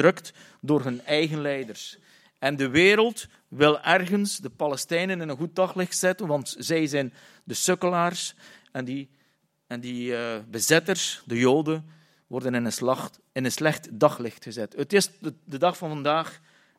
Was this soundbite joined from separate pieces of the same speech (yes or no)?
no